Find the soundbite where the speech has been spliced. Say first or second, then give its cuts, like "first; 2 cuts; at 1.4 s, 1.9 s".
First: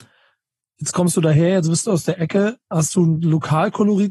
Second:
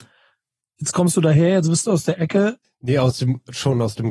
second; 1 cut; at 2.6 s